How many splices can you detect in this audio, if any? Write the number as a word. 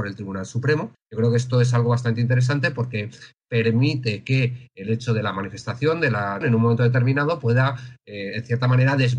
two